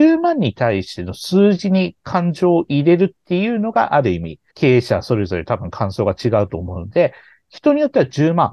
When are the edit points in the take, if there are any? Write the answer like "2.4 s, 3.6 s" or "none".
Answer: 4.5 s